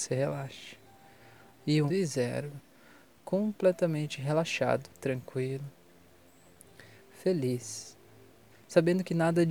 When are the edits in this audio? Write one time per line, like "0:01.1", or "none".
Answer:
0:01.9
0:04.9
0:08.5